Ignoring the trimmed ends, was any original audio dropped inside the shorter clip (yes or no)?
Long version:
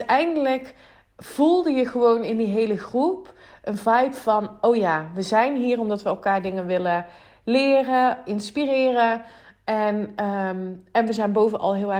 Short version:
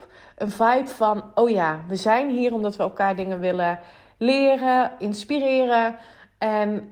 no